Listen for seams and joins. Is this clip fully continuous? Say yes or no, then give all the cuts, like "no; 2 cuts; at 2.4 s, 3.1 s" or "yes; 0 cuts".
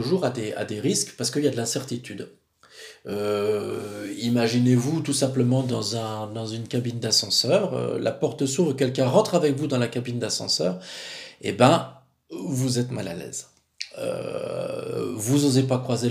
yes; 0 cuts